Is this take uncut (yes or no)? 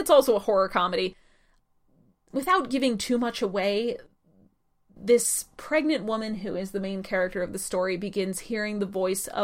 yes